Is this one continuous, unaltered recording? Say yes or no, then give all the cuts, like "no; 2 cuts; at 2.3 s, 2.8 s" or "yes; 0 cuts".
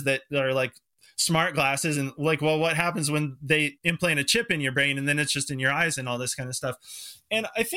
yes; 0 cuts